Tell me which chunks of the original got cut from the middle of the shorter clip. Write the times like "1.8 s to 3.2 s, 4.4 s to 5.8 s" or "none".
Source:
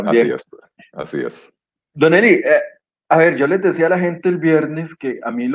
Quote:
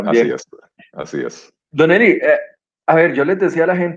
1.6 s to 1.8 s